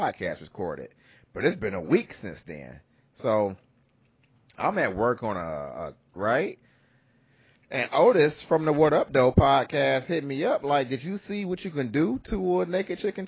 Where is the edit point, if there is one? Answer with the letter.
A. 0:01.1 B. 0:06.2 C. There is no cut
B